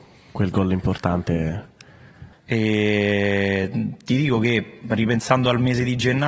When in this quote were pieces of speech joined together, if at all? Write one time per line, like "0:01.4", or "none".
0:02.3